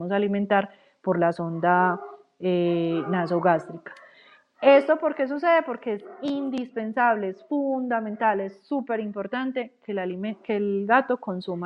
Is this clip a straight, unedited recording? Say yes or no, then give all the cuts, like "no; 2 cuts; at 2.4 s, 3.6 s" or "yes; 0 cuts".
yes; 0 cuts